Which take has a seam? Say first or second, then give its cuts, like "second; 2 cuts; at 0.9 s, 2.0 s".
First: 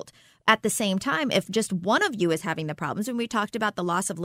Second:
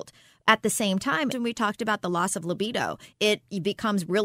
second; 2 cuts; at 1.3 s, 3.1 s